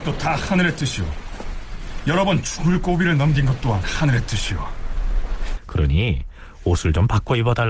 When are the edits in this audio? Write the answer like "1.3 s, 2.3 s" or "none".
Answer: 5.6 s